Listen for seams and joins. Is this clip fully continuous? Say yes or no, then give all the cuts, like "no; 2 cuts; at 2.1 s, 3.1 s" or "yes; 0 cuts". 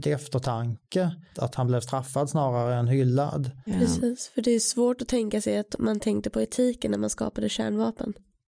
no; 1 cut; at 3.7 s